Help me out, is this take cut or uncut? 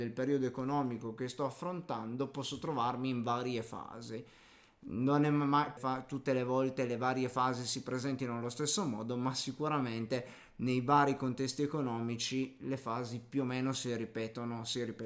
cut